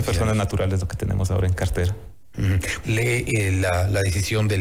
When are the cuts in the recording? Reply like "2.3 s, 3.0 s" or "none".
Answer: 2.8 s